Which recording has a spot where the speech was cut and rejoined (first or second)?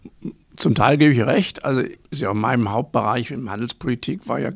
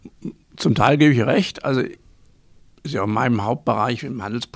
first